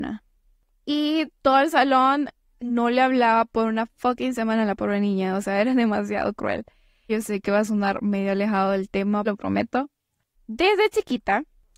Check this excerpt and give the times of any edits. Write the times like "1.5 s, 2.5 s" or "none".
7.1 s, 9.3 s